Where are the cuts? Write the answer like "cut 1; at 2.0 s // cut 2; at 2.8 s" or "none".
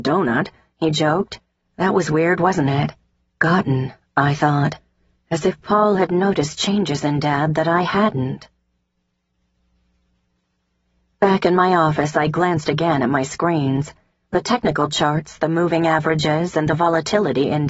cut 1; at 1.6 s // cut 2; at 3.3 s